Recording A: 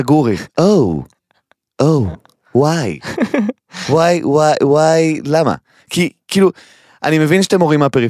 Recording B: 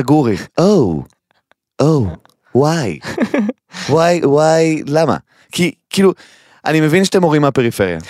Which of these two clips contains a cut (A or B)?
B